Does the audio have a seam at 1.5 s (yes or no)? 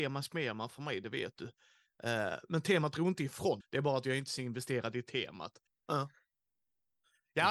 no